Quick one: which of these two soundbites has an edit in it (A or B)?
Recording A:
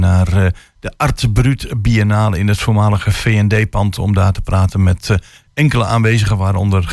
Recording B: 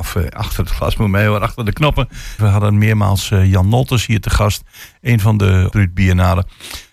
B